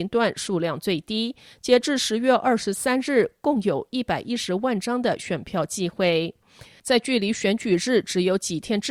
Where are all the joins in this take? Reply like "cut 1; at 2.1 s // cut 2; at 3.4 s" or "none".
none